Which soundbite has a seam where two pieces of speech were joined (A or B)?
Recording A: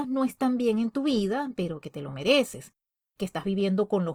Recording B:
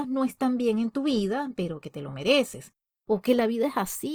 B